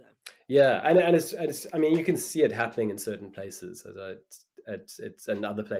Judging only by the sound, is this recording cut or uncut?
uncut